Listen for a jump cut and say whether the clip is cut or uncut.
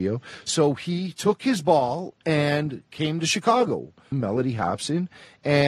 cut